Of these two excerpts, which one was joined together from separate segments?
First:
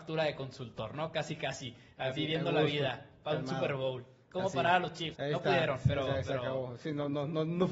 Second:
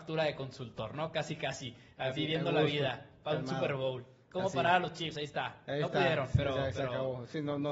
first; 1 cut; at 5.1 s

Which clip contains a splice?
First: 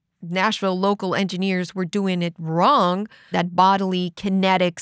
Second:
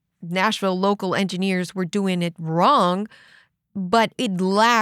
first; 1 cut; at 3.3 s

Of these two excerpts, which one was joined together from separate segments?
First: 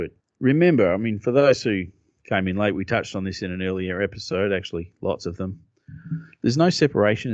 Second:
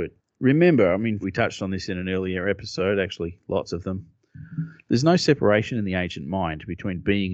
second; 1 cut; at 1.2 s

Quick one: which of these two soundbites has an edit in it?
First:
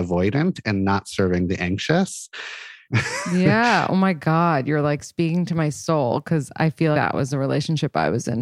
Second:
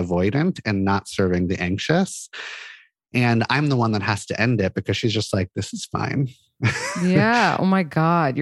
first; 2 cuts; at 2.8 s, 6.9 s

